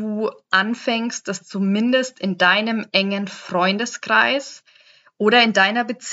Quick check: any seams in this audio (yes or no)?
no